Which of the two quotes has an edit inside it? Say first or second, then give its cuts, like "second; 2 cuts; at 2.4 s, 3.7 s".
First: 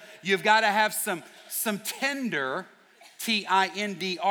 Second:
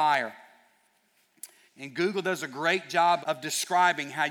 second; 2 cuts; at 1.7 s, 3.2 s